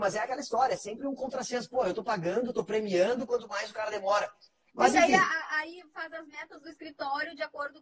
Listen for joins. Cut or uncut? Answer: uncut